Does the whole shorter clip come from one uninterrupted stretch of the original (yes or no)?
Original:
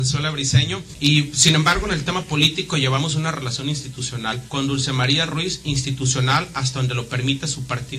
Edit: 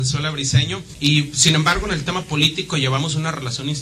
yes